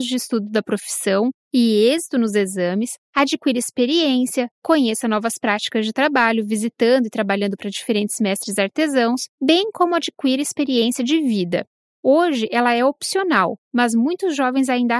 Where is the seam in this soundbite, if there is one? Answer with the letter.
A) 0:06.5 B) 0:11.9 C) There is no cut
B